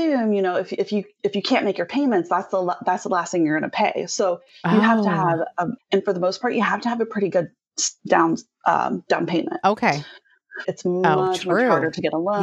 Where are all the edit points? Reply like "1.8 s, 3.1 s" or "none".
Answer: 5.8 s, 10.6 s